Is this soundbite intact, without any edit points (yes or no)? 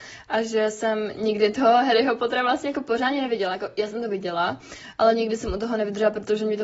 yes